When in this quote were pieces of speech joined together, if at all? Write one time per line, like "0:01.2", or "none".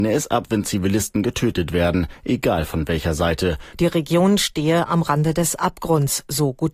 0:03.7